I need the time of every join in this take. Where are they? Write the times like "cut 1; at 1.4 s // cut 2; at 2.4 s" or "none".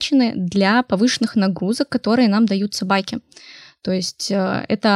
none